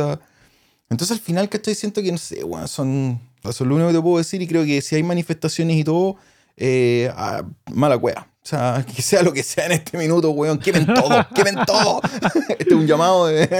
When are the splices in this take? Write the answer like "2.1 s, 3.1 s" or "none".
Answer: 3.4 s